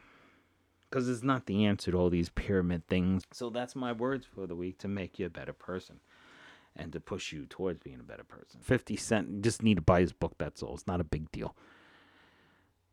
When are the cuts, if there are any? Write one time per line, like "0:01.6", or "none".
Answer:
0:03.2
0:08.6